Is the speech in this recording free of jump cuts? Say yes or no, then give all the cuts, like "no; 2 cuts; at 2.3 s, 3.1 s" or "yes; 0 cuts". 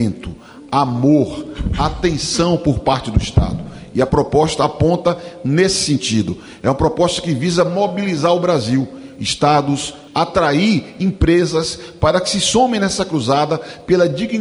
no; 1 cut; at 10.1 s